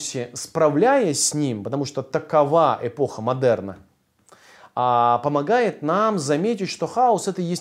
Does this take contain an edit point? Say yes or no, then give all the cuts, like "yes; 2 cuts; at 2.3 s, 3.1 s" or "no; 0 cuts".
no; 0 cuts